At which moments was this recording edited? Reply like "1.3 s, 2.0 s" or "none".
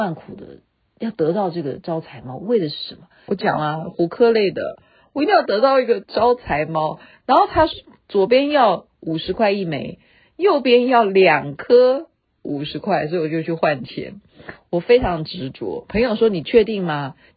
3.3 s